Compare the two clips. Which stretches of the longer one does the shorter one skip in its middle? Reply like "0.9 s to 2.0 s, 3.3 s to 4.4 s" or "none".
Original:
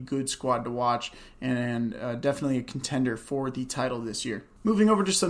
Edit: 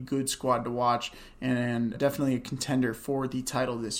1.9 s to 2.2 s